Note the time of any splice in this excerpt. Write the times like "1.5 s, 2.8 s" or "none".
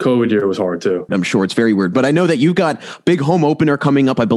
1.1 s

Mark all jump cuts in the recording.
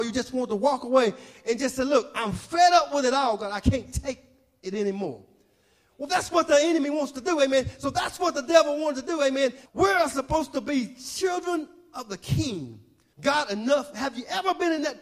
9.7 s, 13.1 s

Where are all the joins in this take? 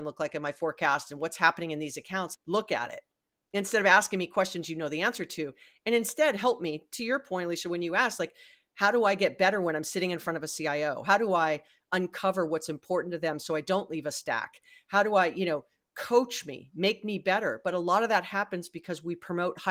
2.3 s

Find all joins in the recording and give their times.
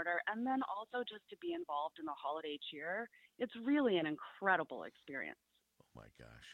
5.6 s

